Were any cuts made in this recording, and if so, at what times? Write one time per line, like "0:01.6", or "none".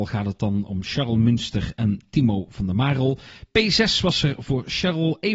none